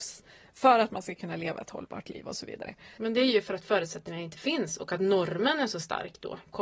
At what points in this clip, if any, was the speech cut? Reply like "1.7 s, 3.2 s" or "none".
3.0 s